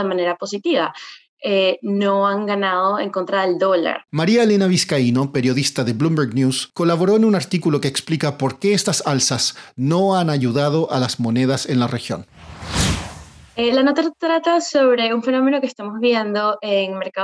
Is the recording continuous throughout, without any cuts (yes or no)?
no